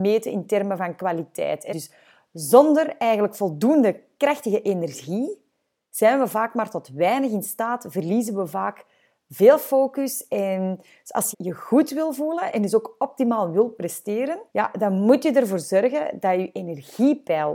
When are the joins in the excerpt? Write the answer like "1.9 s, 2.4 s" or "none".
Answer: 1.7 s, 11.3 s, 14.5 s